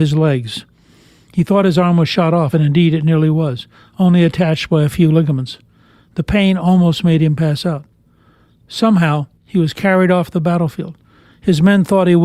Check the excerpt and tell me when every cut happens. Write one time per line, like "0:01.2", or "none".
none